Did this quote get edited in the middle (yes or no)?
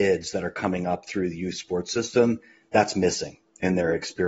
no